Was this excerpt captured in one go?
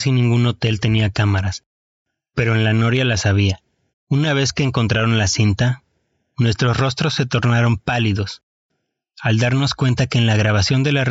no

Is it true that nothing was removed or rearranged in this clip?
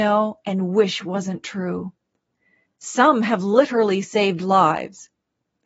no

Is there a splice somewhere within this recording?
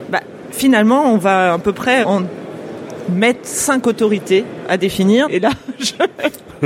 yes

